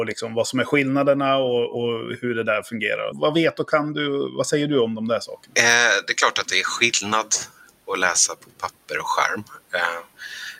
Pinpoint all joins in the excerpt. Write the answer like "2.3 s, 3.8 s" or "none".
3.1 s